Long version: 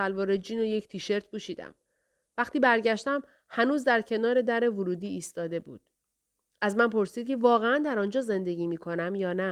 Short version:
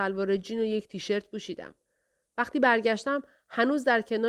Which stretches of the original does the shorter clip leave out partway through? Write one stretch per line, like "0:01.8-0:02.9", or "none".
none